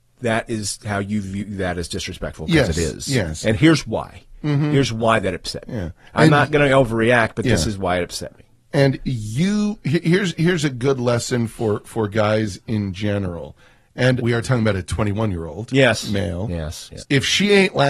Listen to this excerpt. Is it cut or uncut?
cut